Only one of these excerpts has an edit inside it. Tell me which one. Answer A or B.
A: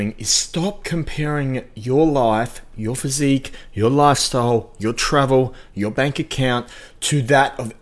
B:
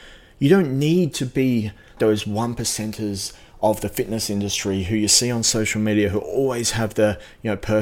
B